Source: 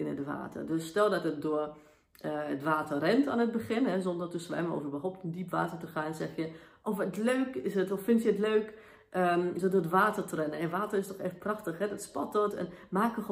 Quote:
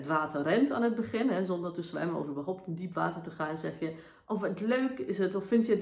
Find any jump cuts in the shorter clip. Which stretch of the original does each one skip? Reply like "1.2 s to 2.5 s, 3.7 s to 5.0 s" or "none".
none